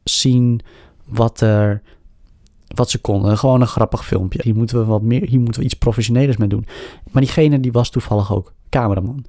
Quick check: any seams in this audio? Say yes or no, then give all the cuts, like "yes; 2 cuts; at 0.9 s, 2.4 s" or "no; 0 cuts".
yes; 1 cut; at 4.4 s